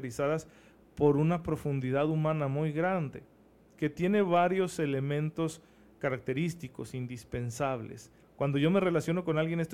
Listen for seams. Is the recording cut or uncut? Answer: cut